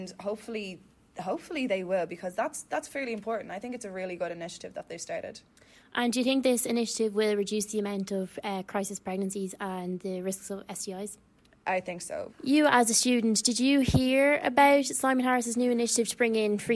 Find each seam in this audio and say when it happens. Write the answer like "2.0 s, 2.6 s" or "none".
12.3 s